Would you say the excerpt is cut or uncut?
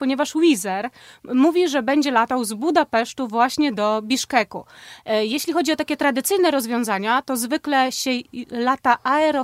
uncut